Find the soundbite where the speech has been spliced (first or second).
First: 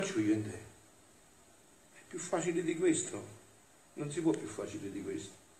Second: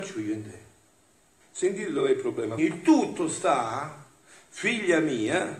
second